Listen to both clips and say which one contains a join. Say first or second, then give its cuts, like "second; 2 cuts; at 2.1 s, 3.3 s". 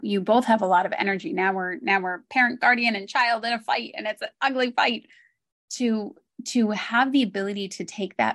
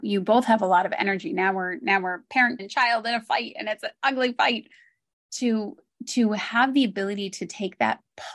second; 1 cut; at 2.6 s